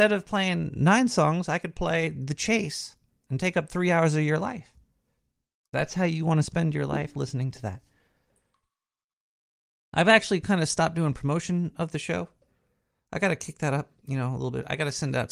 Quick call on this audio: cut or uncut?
uncut